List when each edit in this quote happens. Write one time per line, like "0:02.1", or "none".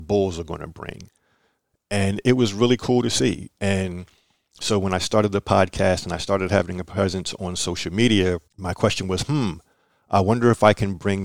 0:03.6
0:08.5